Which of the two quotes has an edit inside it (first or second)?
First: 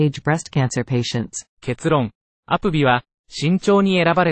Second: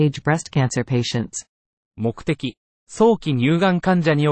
first